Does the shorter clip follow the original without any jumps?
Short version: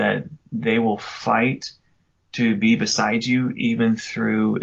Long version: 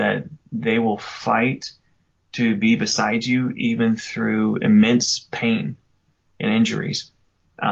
yes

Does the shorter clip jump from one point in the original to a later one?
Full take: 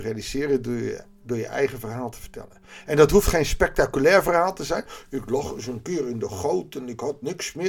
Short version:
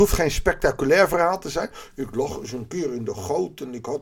no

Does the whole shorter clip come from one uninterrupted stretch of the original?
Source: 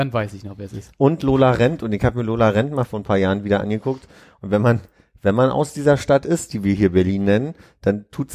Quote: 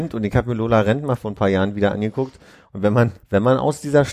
no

